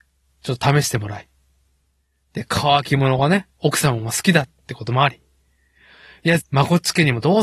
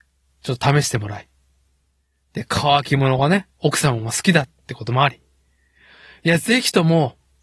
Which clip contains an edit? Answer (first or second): first